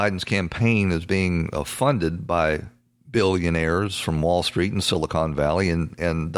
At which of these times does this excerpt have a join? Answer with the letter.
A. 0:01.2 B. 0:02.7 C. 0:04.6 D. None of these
D